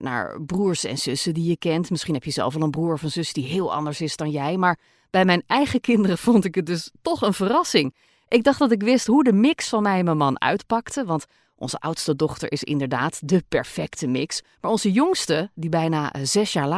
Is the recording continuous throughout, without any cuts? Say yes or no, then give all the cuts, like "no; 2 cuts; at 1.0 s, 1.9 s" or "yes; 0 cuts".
yes; 0 cuts